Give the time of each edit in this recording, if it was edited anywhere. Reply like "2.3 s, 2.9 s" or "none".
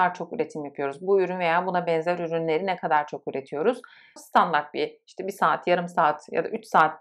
4.2 s